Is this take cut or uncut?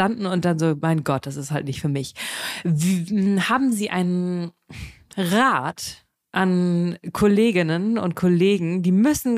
uncut